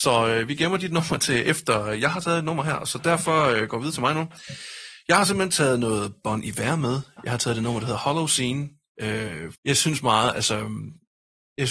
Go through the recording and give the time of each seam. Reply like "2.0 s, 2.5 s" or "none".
9.5 s

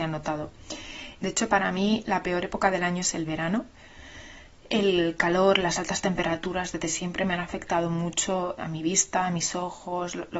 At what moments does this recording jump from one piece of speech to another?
1.2 s, 8.6 s

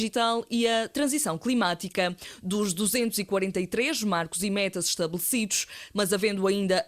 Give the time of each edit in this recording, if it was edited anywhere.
5.9 s

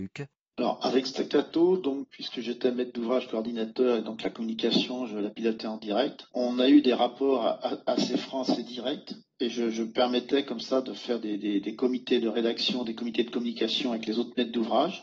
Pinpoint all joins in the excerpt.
none

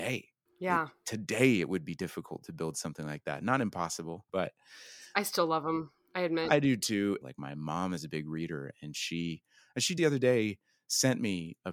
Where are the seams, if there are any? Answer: 4.3 s, 7.2 s, 10.0 s

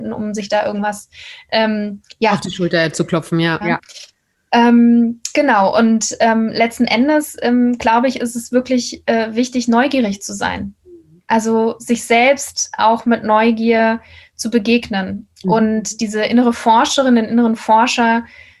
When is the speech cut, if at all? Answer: 3.6 s

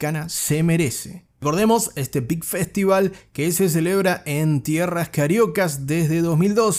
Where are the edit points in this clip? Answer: 1.3 s

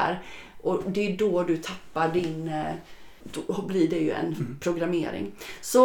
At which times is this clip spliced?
3.2 s

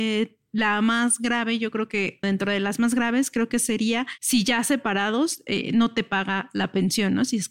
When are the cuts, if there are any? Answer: 2.2 s

